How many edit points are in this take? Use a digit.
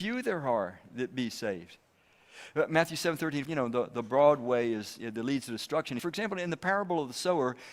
2